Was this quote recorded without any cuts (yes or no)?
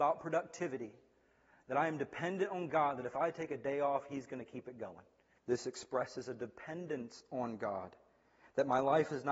no